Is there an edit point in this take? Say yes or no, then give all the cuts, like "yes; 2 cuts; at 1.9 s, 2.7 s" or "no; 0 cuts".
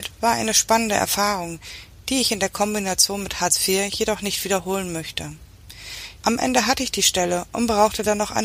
yes; 1 cut; at 6.2 s